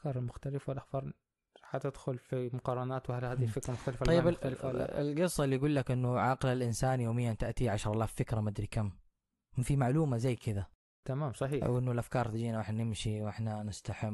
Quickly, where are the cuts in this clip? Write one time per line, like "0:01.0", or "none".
none